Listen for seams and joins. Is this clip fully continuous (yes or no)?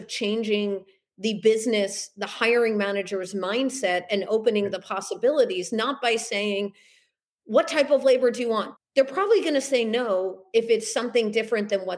no